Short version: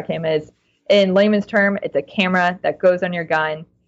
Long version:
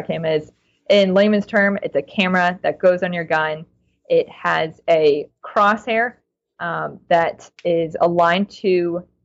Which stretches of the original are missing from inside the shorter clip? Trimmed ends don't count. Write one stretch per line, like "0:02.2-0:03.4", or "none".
none